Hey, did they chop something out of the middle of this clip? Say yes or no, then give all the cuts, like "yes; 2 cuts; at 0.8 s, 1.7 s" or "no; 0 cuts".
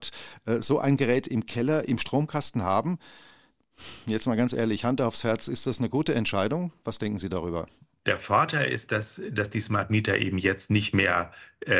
no; 0 cuts